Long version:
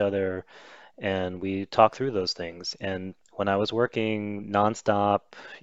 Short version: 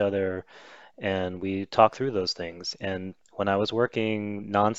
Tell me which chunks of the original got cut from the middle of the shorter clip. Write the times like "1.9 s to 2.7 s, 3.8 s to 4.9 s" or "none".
none